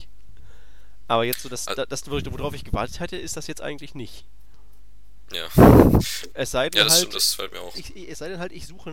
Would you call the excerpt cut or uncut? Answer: cut